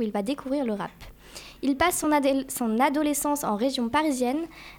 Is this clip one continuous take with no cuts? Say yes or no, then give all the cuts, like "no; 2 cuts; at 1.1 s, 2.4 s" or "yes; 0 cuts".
yes; 0 cuts